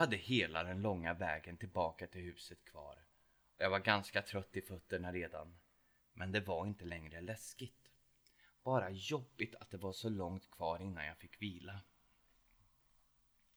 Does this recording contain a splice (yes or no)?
no